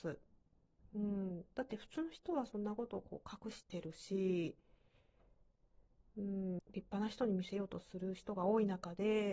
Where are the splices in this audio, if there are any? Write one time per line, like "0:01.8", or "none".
0:06.6